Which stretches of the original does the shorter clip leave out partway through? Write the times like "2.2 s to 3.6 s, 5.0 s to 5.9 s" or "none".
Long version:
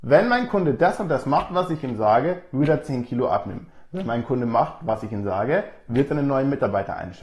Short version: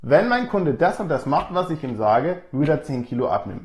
none